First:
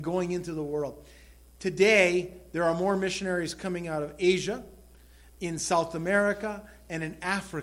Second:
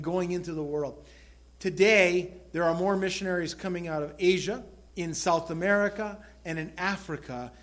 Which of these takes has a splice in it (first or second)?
second